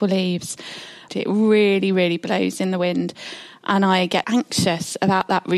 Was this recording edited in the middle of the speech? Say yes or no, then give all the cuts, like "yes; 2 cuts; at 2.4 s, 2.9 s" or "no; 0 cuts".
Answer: yes; 2 cuts; at 1.1 s, 4.2 s